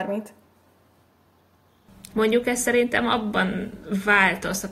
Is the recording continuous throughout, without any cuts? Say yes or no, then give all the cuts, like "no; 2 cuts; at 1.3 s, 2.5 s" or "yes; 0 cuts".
no; 1 cut; at 2.1 s